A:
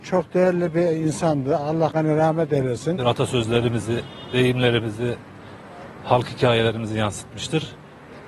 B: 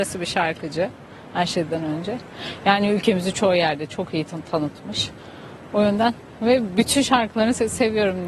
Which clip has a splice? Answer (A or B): A